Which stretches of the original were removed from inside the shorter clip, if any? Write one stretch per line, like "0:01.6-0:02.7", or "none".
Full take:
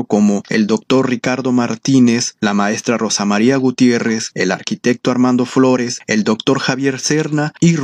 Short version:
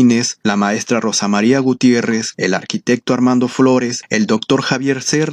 none